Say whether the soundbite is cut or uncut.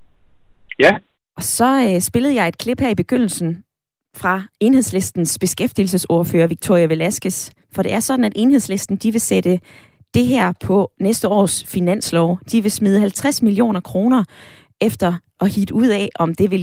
cut